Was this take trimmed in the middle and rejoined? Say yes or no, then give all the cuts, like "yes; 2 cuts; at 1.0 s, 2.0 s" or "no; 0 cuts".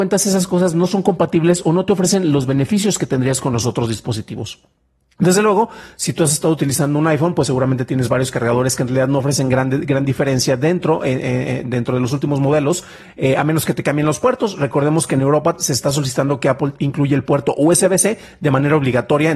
no; 0 cuts